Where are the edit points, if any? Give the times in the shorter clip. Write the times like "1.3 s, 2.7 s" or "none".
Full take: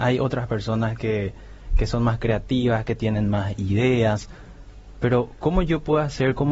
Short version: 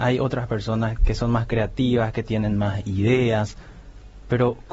1.0 s